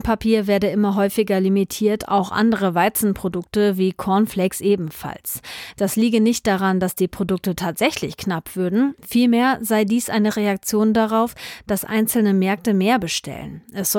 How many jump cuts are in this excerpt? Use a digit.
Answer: 0